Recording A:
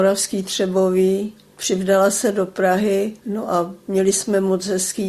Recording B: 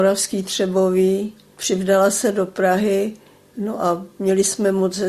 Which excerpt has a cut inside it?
A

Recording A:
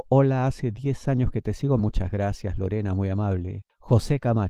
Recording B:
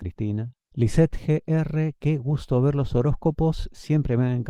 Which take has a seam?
A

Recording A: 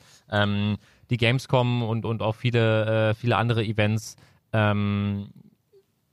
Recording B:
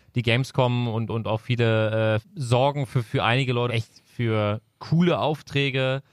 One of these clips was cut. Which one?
B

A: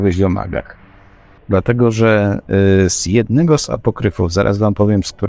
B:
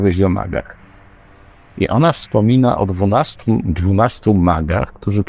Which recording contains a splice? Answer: A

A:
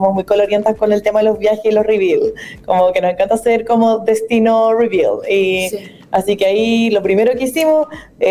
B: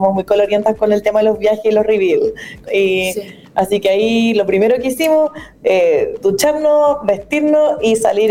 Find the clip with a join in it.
B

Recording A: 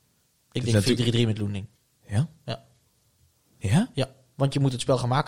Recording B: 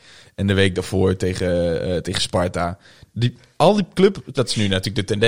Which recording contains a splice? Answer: B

